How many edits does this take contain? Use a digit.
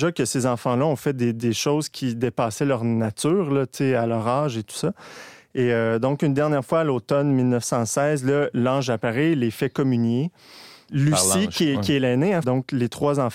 2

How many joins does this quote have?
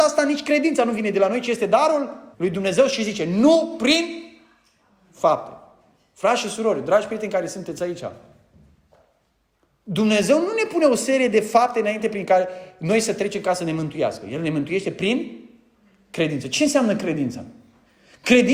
1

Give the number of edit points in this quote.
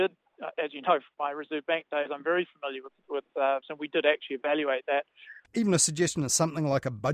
2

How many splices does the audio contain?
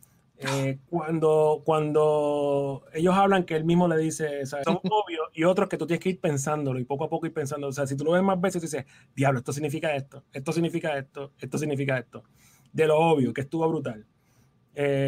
1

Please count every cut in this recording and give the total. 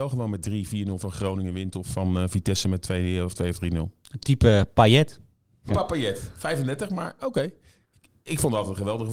1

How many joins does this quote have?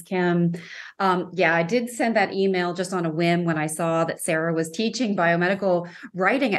0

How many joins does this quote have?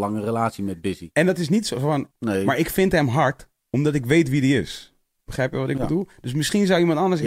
1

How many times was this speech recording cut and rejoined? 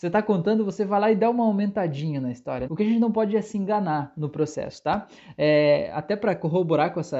1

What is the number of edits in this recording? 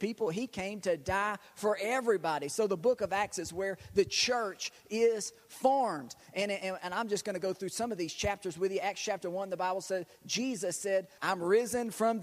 1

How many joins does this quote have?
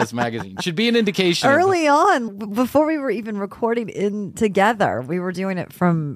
1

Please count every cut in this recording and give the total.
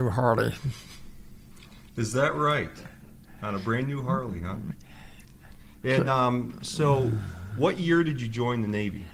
0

